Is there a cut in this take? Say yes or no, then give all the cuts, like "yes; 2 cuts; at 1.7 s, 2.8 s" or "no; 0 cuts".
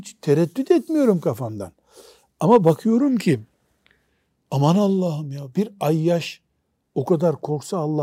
no; 0 cuts